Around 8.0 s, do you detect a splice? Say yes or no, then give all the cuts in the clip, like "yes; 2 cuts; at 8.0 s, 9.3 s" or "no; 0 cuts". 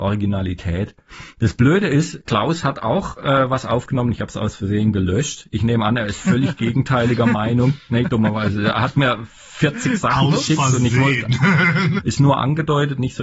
yes; 2 cuts; at 8.0 s, 12.0 s